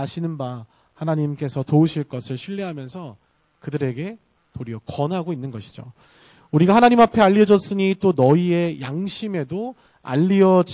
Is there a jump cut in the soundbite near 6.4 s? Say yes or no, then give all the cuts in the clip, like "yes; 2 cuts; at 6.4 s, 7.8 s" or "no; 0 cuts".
no; 0 cuts